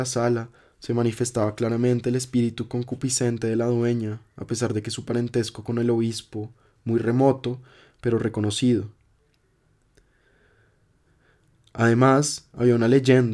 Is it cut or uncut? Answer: uncut